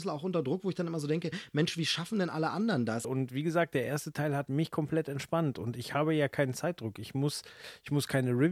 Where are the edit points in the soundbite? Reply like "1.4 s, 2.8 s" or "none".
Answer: 3.0 s